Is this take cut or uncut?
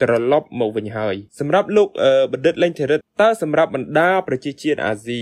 cut